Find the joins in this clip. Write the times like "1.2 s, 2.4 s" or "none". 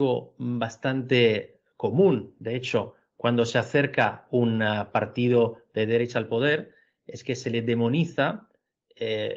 none